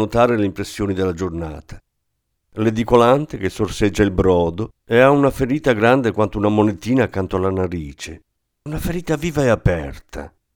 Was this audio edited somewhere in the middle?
yes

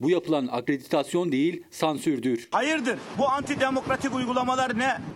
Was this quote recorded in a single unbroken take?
no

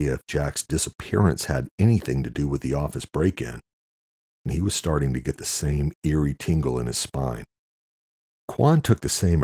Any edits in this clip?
yes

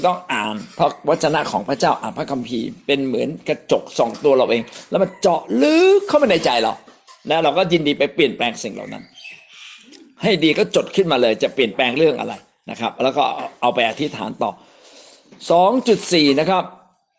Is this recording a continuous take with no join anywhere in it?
yes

